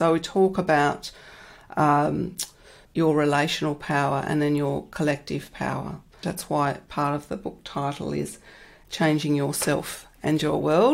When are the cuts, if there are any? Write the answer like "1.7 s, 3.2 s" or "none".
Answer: 2.9 s, 6.2 s

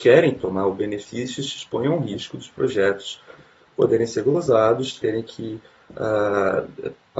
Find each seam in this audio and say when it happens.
none

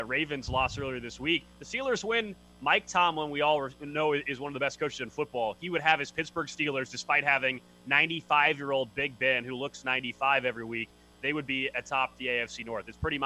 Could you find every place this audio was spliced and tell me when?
none

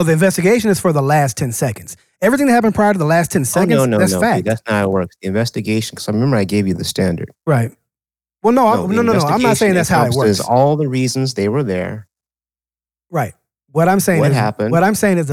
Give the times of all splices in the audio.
none

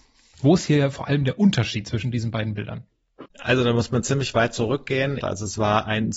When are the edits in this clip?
3.3 s, 5.2 s

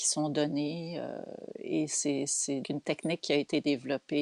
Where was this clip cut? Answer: 2.6 s

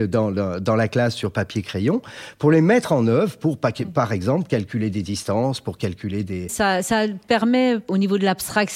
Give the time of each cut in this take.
6.5 s

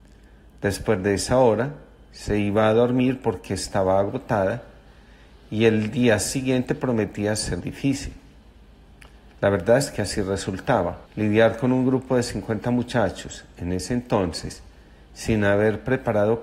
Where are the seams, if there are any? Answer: 7.6 s, 11.1 s

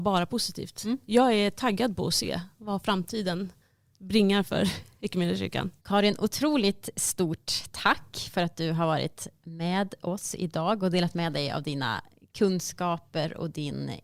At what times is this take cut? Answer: 5.8 s

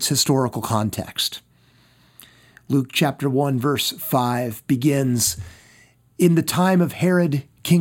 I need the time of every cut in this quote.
none

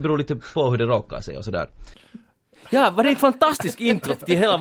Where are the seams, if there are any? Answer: none

